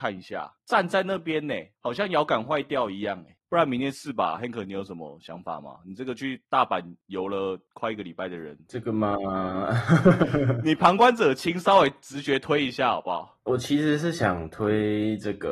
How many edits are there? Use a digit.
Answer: 0